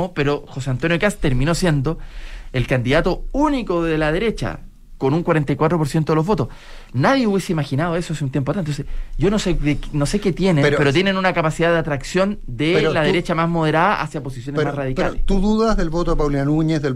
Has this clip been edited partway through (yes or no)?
no